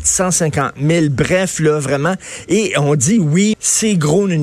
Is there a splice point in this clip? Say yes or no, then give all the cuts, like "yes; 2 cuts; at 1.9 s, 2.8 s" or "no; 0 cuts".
yes; 1 cut; at 3.5 s